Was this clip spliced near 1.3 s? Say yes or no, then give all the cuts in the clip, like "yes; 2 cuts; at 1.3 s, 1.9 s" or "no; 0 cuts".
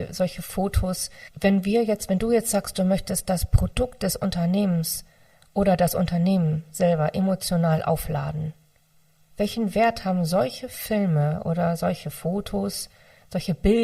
yes; 1 cut; at 1.3 s